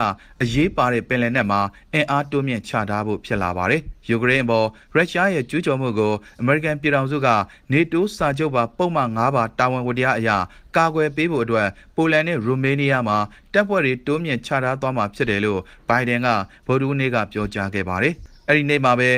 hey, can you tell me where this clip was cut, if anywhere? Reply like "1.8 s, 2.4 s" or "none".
none